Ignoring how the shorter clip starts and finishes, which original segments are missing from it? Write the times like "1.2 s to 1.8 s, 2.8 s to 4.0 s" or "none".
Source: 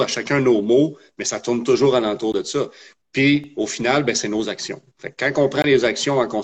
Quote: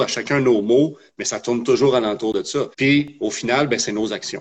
2.7 s to 3.1 s